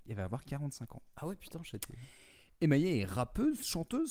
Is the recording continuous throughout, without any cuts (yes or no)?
yes